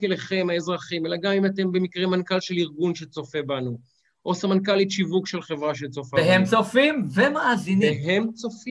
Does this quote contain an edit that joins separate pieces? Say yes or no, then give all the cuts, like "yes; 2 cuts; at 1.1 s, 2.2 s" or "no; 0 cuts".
no; 0 cuts